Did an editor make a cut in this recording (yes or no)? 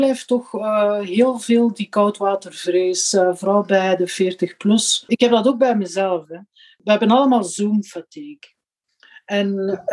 no